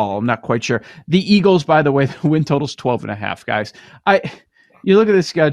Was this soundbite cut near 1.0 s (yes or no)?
no